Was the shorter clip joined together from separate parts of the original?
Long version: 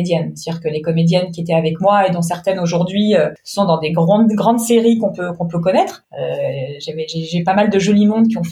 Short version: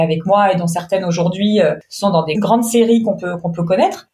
yes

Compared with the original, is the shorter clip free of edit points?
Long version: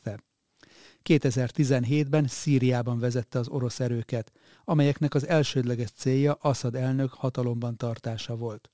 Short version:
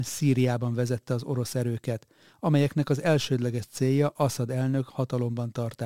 yes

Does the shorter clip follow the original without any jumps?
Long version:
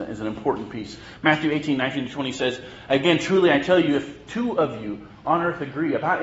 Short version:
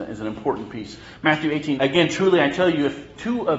no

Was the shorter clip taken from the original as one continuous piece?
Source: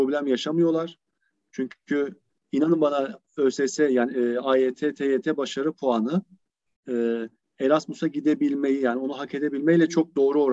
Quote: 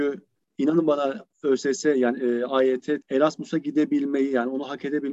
no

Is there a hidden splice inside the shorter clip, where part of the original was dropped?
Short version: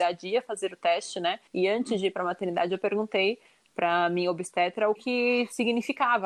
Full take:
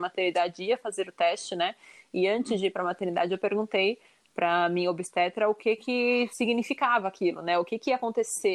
yes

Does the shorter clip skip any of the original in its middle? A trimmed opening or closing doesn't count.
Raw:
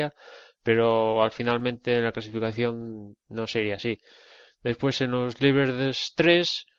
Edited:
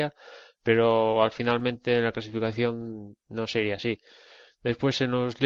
no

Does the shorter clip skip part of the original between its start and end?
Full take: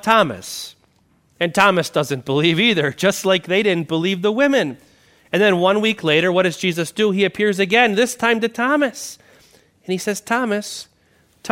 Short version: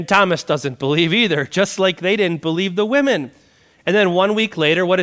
no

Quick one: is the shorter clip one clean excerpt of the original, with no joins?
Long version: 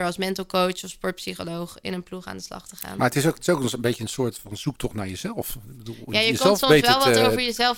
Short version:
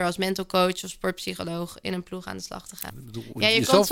no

